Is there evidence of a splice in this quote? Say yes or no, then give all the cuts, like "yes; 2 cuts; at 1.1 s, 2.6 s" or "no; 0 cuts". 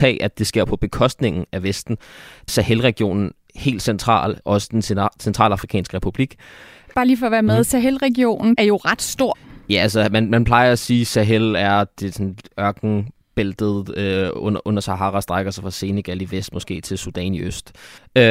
yes; 1 cut; at 2.5 s